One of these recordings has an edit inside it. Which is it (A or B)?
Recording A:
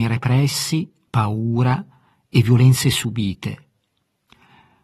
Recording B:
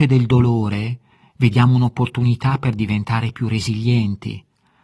A